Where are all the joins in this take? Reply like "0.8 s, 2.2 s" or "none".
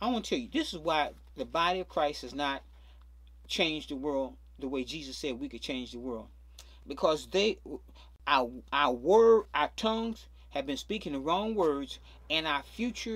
none